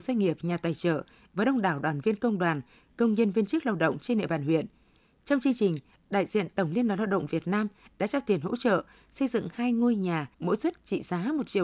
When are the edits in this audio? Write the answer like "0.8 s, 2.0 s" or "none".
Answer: 10.3 s